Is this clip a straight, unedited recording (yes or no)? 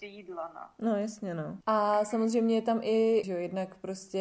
no